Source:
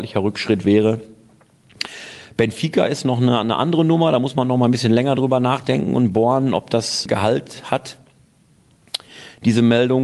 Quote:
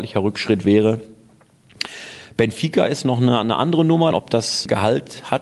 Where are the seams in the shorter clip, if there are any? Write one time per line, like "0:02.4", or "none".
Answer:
0:04.1